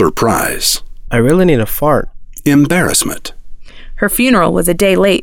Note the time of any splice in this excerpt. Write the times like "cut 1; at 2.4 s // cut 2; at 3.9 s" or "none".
none